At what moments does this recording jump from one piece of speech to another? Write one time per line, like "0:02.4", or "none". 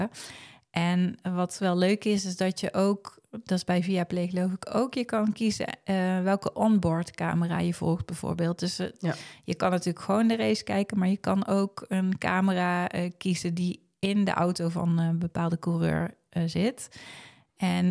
none